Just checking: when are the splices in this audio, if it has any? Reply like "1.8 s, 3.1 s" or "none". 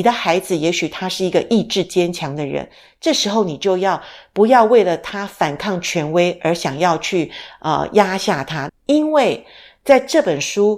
8.7 s